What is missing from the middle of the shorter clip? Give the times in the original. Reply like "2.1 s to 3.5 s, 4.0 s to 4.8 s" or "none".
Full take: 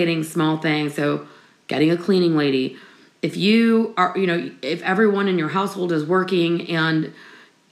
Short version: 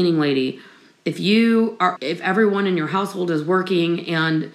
4.1 s to 4.6 s